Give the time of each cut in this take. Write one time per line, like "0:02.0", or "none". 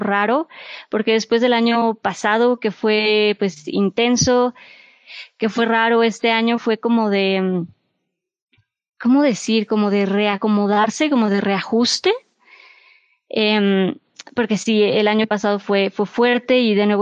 none